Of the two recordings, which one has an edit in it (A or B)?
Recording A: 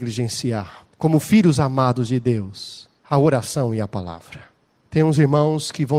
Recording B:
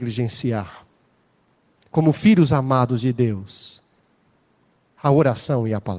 A